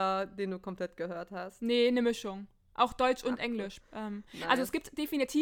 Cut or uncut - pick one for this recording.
cut